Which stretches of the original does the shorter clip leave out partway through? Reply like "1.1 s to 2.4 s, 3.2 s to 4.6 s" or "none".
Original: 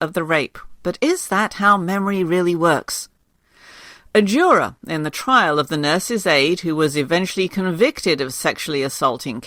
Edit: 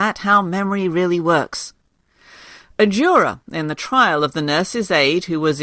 none